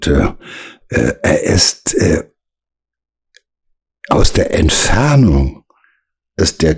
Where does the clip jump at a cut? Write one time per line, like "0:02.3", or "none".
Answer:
none